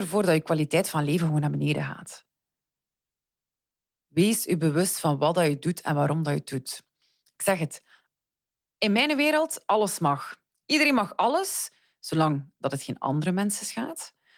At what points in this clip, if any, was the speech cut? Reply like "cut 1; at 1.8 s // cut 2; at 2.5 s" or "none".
none

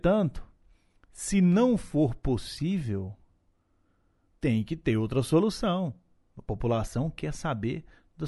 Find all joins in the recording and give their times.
cut 1; at 4.4 s

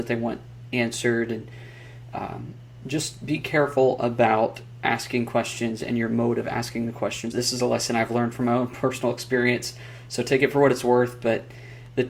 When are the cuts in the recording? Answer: cut 1; at 7.3 s

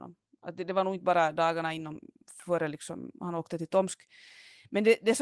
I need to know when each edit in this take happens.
none

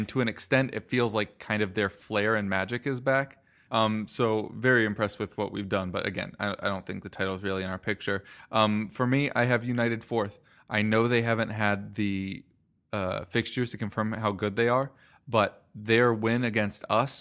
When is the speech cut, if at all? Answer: cut 1; at 3.7 s

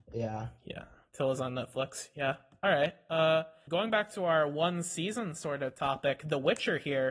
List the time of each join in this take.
cut 1; at 3.7 s

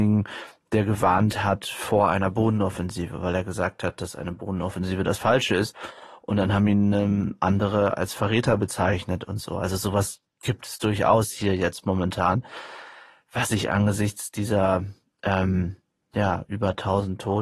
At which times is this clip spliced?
none

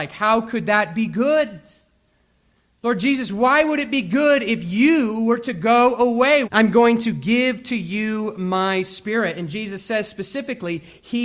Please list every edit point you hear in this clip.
cut 1; at 6.5 s

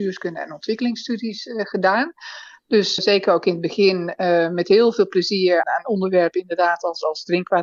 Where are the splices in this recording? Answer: cut 1; at 3.0 s // cut 2; at 5.6 s

